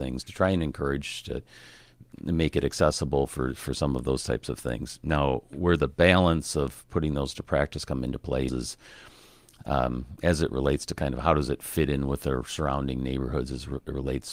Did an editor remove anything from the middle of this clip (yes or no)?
yes